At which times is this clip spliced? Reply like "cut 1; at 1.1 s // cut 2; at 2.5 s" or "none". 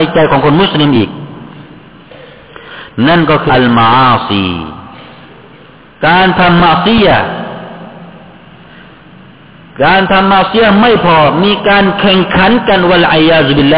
cut 1; at 3.5 s